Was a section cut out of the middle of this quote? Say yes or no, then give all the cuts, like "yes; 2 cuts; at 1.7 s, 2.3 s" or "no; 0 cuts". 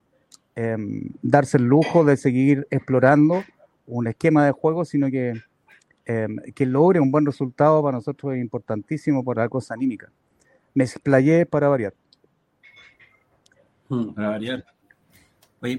no; 0 cuts